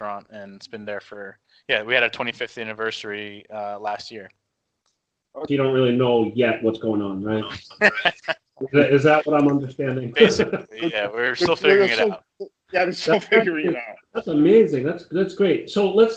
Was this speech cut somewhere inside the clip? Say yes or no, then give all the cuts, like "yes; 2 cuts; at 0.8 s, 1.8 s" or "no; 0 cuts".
yes; 1 cut; at 5.5 s